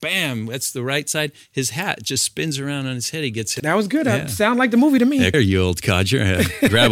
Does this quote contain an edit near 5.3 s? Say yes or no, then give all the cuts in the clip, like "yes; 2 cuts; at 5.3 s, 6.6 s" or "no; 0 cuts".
yes; 2 cuts; at 3.6 s, 5.3 s